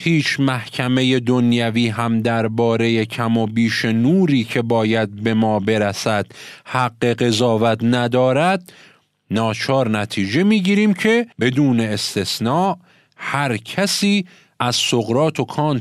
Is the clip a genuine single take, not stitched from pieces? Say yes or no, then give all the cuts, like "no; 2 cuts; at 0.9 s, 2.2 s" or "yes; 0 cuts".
no; 1 cut; at 11.3 s